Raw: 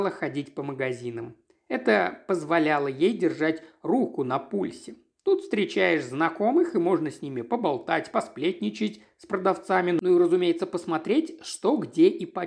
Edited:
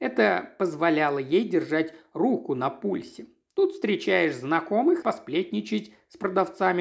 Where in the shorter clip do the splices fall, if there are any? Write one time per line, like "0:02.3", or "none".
0:05.0